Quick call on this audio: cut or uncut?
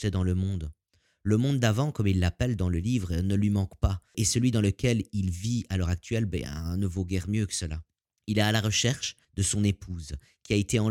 uncut